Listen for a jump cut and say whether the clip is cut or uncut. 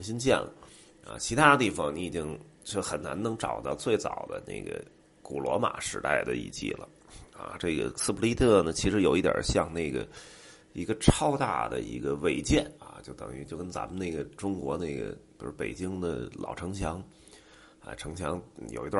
cut